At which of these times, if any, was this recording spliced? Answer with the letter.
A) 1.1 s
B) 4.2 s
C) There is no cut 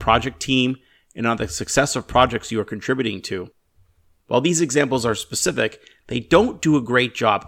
B